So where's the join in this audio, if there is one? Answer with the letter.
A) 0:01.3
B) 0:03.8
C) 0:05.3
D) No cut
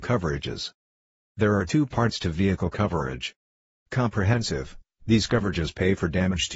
B